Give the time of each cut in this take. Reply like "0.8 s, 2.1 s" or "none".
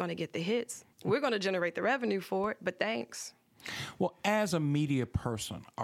0.9 s